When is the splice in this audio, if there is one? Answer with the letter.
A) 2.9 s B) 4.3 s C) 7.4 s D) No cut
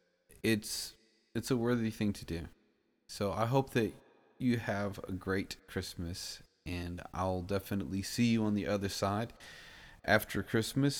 D